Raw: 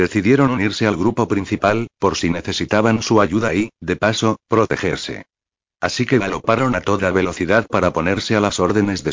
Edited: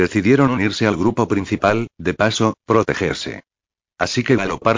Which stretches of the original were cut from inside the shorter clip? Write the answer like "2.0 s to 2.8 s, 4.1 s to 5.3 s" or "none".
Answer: 1.9 s to 3.7 s